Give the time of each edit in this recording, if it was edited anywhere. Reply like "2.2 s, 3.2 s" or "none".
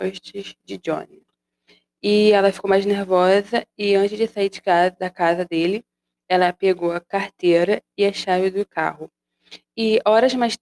none